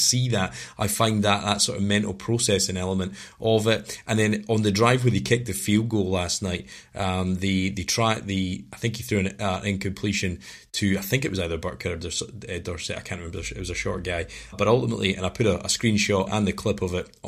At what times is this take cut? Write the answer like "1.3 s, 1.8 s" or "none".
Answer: 14.5 s, 16.3 s